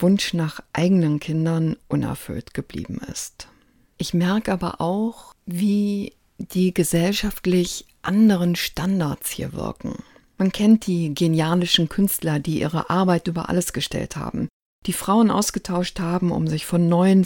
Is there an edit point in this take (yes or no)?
no